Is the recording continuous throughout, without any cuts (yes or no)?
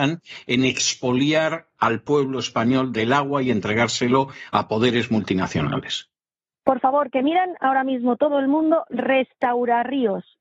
yes